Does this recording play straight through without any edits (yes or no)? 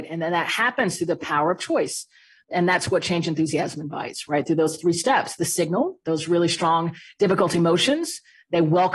yes